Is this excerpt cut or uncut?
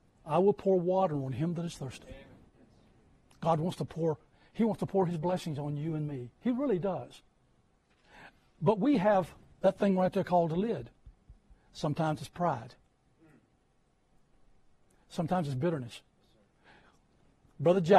uncut